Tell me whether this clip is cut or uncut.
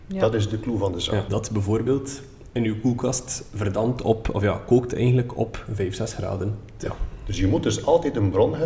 cut